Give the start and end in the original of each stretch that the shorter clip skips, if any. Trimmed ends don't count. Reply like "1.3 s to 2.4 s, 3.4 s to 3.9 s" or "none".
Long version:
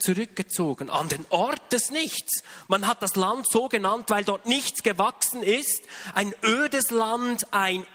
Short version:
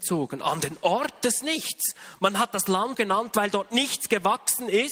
3.4 s to 3.7 s